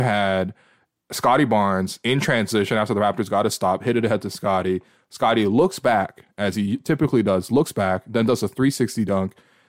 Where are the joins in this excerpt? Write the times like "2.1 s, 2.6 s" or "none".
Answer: none